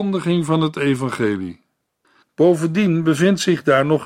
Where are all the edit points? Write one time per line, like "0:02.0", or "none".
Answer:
0:02.2